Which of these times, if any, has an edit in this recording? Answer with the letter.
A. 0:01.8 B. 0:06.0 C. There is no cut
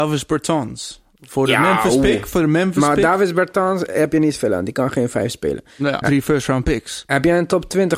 B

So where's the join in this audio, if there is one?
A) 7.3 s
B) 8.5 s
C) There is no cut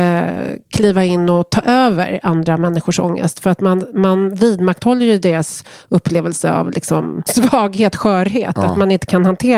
A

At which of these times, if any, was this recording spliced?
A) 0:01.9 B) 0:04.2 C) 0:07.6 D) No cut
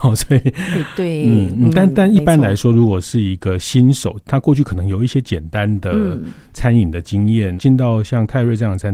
C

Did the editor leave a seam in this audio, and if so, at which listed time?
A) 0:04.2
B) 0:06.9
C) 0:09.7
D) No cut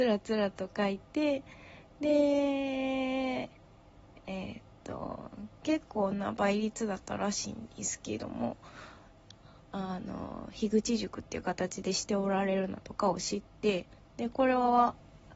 C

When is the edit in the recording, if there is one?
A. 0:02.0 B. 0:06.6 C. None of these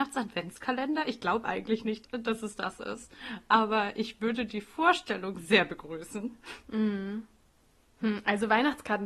A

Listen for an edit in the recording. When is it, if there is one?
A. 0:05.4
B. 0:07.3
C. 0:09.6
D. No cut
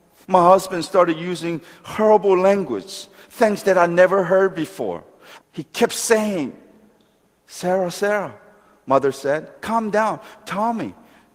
A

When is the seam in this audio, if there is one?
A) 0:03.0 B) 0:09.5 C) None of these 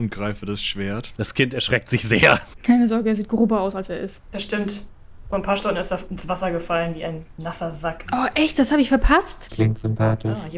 B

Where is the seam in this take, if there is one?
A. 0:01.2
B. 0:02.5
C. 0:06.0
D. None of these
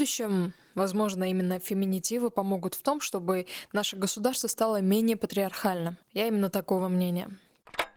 C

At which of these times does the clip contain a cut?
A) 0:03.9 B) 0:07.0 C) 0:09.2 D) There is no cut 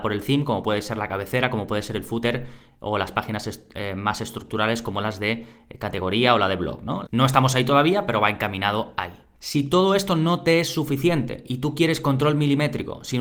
B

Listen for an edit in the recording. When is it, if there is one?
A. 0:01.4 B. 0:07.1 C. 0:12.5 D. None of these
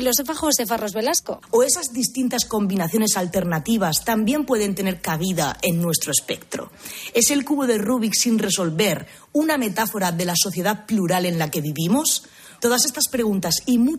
A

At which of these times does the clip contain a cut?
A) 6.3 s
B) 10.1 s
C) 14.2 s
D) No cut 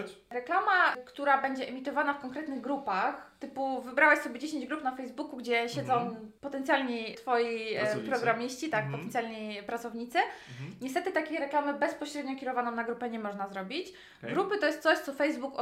D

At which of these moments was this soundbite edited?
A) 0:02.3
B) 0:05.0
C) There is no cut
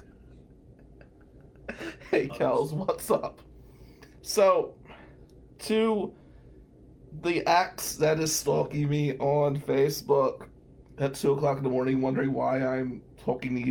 A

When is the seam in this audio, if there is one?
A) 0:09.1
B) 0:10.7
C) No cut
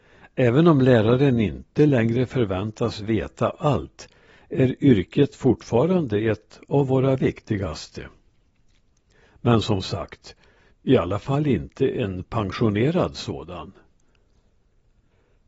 B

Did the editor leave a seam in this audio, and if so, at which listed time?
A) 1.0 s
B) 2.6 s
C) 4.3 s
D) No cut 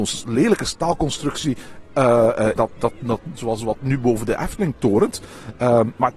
B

